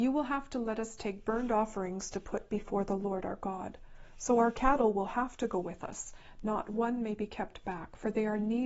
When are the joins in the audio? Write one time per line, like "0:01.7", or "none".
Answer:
none